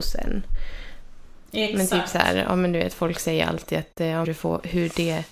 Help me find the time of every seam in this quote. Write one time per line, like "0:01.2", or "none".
0:04.2